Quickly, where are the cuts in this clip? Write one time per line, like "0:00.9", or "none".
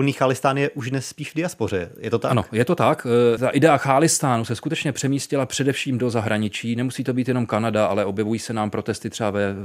none